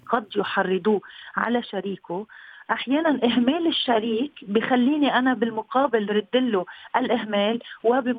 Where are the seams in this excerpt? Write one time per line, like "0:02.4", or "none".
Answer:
none